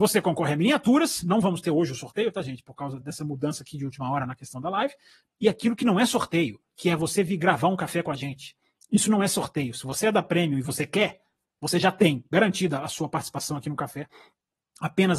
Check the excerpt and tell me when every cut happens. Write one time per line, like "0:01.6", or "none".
0:03.0
0:05.3